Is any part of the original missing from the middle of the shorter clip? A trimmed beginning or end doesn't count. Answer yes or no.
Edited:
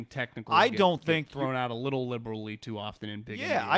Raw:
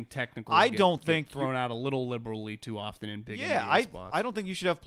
no